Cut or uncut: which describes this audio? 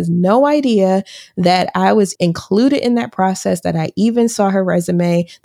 cut